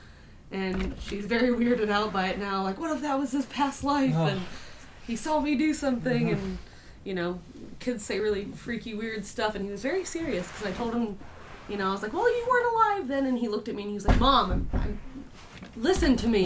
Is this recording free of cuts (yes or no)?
yes